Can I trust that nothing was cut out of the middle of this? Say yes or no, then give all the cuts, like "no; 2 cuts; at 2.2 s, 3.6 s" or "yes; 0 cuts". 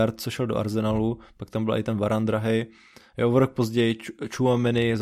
yes; 0 cuts